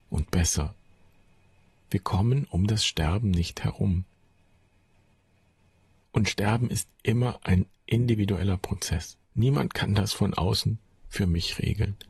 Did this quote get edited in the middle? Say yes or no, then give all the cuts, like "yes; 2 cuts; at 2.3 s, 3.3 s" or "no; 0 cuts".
yes; 1 cut; at 9.2 s